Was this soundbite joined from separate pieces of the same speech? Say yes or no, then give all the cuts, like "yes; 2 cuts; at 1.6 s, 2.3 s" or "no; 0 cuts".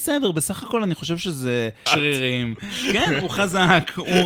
yes; 1 cut; at 1.9 s